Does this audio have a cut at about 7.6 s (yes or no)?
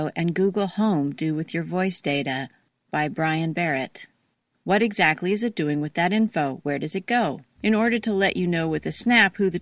yes